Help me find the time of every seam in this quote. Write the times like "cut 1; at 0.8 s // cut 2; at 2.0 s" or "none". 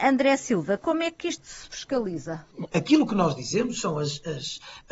cut 1; at 2.7 s